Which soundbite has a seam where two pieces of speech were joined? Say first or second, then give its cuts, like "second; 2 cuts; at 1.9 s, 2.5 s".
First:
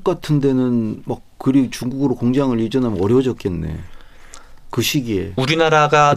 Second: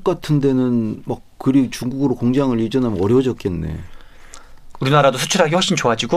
second; 1 cut; at 4.7 s